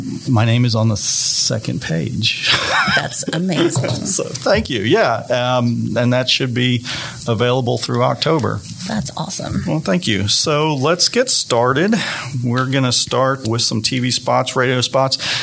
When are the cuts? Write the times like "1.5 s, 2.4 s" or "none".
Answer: none